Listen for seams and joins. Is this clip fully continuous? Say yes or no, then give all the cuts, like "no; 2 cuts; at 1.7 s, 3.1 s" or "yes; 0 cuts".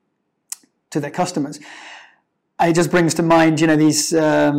yes; 0 cuts